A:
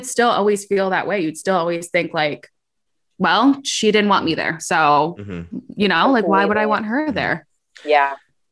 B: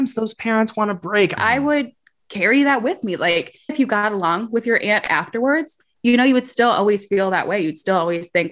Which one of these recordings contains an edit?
B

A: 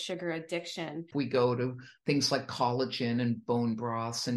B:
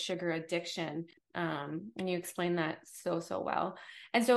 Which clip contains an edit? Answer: A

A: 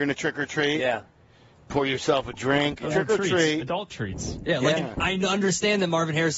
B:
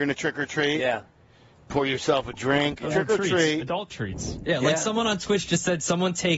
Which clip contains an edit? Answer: A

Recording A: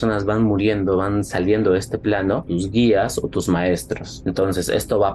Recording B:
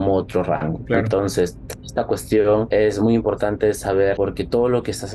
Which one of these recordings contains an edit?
A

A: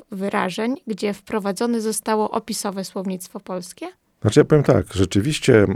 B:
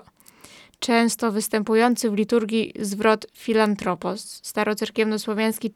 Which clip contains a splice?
A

